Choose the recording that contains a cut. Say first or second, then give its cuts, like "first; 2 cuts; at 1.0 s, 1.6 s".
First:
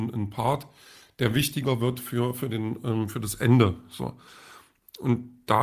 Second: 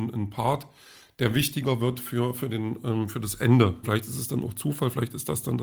second; 1 cut; at 3.8 s